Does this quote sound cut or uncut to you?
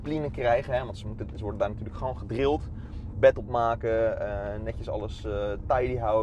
uncut